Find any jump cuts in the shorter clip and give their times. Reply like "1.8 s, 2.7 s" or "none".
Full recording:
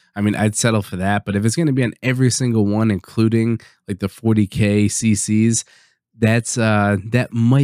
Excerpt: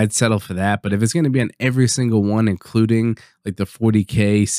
none